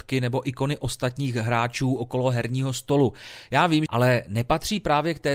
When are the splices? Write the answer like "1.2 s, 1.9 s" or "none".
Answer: 3.9 s